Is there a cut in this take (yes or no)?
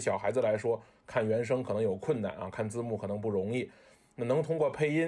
no